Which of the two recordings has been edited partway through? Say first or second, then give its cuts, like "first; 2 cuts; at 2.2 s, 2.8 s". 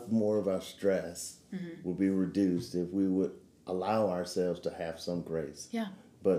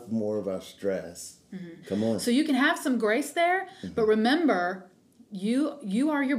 second; 1 cut; at 1.8 s